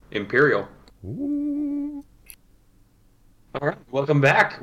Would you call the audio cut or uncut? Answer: uncut